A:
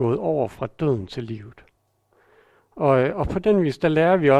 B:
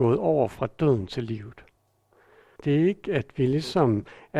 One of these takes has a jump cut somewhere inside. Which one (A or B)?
B